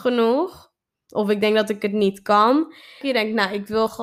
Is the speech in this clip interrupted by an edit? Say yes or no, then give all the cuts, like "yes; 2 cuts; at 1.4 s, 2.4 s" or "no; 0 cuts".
yes; 1 cut; at 3.0 s